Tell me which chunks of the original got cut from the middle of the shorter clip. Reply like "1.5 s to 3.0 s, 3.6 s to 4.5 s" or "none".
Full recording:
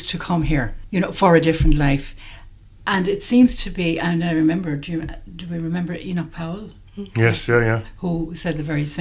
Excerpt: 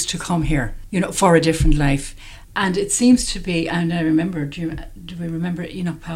2.4 s to 2.7 s